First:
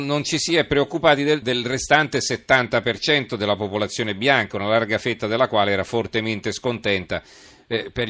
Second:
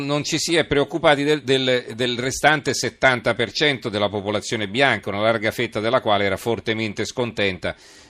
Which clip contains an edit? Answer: first; 1 cut; at 1.4 s

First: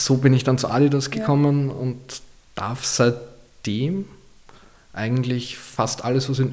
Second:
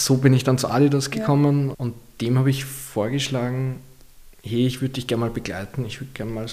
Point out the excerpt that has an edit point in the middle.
second; 1 cut; at 1.7 s

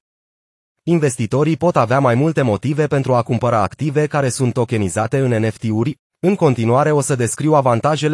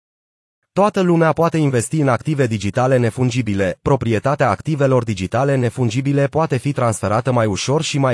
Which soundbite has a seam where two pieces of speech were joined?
first; 1 cut; at 6.0 s

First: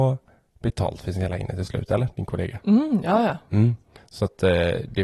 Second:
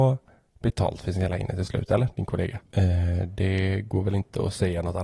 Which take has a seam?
second; 1 cut; at 2.6 s

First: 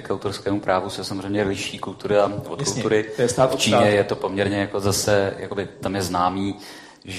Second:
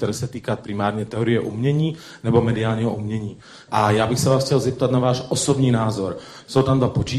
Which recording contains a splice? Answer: second; 1 cut; at 3.7 s

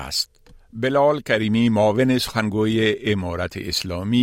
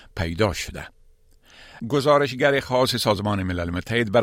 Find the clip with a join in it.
second; 1 cut; at 1.8 s

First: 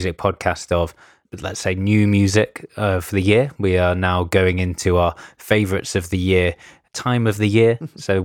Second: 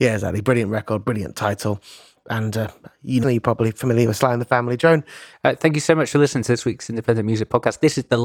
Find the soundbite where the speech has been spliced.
second; 2 cuts; at 3.2 s, 5.3 s

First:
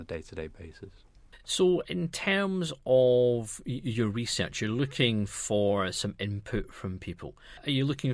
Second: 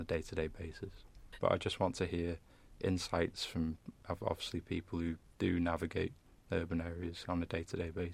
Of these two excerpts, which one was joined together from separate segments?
second; 1 cut; at 1.4 s

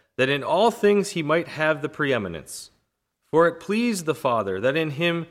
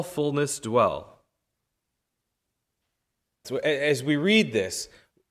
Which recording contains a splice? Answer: second; 1 cut; at 3.4 s

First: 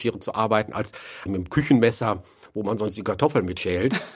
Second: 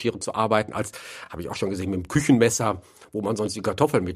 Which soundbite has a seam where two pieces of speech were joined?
first; 1 cut; at 1.3 s

